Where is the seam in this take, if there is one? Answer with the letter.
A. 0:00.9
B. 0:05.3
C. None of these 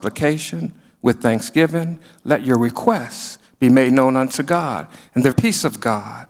B